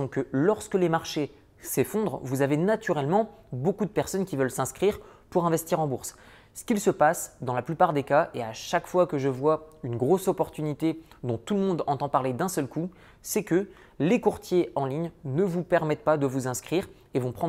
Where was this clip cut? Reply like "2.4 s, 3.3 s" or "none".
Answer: none